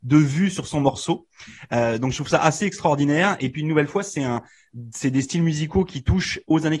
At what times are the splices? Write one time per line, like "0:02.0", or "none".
none